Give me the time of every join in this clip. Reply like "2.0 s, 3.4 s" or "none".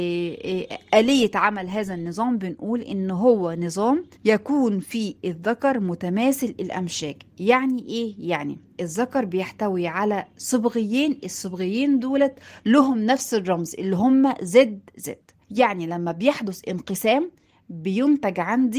4.1 s, 15.4 s

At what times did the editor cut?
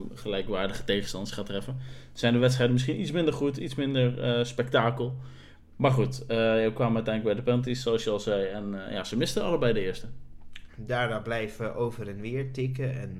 10.7 s

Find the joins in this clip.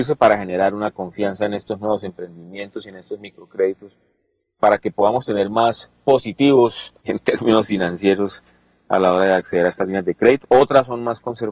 7.0 s, 10.4 s

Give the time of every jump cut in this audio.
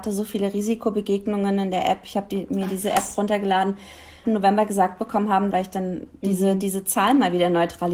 4.2 s, 5.5 s

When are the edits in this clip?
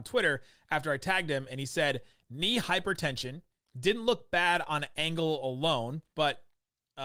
6.1 s

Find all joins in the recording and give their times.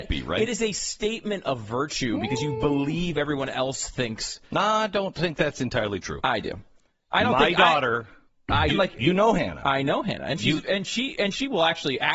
8.7 s

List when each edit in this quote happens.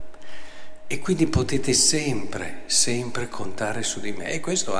none

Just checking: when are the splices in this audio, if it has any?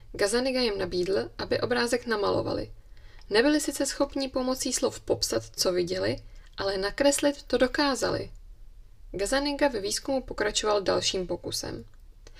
none

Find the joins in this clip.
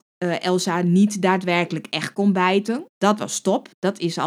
2.9 s

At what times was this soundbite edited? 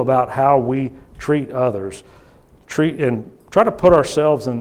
none

